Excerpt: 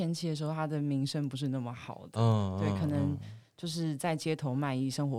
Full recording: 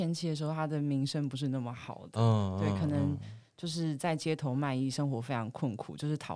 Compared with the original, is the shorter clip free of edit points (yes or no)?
yes